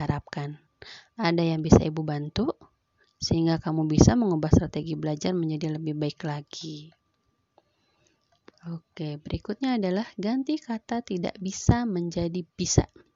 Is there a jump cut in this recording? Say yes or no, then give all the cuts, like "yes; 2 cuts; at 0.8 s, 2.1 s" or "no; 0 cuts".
no; 0 cuts